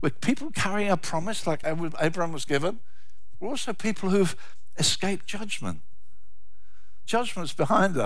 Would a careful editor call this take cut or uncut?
uncut